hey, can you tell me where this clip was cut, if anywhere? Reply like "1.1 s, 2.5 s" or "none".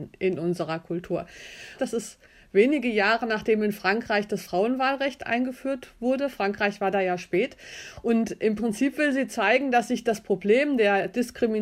1.8 s